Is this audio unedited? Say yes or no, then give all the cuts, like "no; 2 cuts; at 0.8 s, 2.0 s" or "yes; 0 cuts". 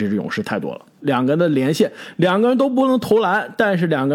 no; 1 cut; at 1.0 s